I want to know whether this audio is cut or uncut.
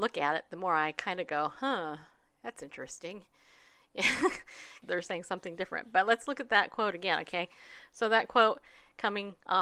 cut